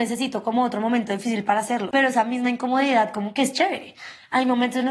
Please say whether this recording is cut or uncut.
cut